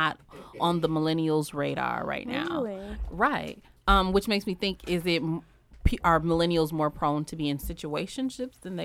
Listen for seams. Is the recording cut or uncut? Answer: uncut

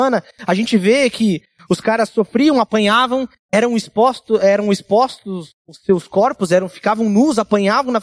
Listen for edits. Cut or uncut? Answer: uncut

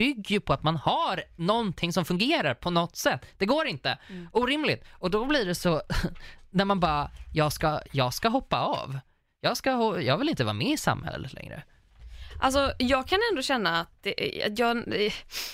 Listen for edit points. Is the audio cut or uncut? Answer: uncut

